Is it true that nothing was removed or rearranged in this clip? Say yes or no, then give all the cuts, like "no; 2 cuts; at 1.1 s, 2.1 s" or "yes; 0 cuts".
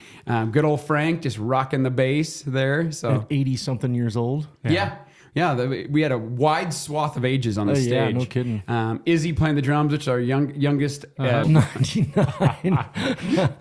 no; 1 cut; at 11.4 s